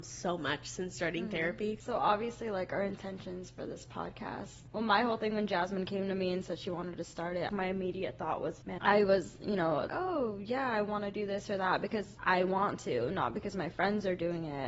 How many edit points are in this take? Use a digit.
2